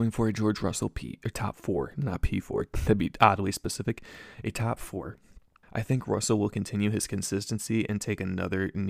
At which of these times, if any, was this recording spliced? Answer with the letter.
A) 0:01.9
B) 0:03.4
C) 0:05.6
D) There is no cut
C